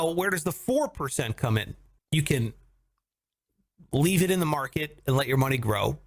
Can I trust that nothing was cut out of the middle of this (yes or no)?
no